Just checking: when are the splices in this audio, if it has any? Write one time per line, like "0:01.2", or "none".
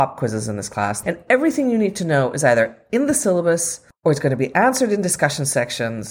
0:01.0
0:03.9